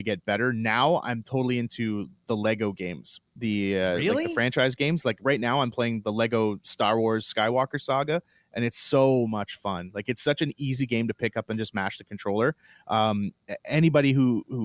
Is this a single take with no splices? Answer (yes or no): no